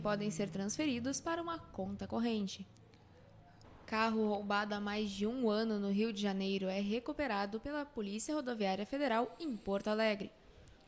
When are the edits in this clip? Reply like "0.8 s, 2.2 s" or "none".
3.6 s